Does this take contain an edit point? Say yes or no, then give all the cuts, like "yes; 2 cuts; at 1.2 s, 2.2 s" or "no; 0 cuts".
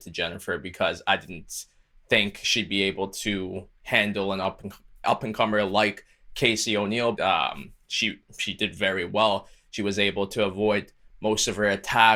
yes; 1 cut; at 7.2 s